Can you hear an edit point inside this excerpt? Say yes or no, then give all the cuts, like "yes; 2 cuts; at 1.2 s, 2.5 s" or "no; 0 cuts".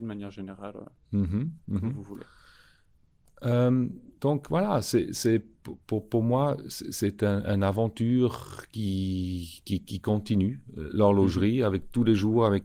no; 0 cuts